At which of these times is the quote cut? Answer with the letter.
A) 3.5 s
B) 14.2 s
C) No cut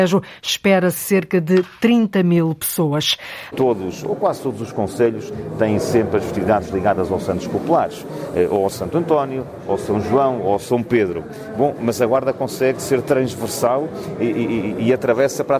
A